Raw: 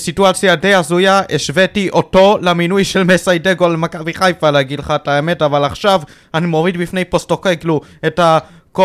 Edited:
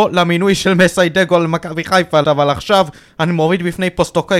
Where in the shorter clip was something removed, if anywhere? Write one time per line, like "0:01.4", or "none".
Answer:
0:02.2